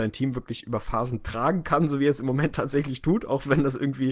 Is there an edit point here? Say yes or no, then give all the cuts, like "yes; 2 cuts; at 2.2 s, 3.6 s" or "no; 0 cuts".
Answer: no; 0 cuts